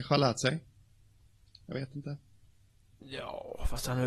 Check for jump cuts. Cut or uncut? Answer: uncut